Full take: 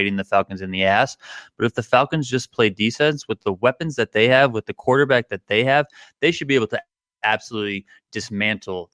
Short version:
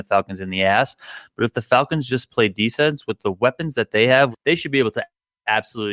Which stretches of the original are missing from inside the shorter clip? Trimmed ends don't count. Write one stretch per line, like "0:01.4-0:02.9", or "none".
0:04.5-0:06.1